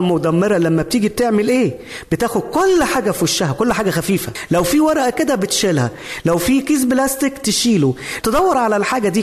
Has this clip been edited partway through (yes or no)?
yes